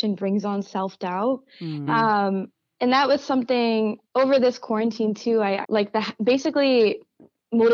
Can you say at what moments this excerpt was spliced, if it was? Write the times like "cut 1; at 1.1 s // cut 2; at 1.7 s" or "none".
cut 1; at 1.9 s // cut 2; at 5.6 s